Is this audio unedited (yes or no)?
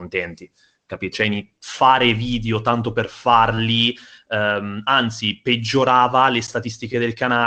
no